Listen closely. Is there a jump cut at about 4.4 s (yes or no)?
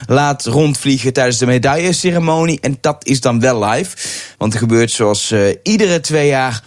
yes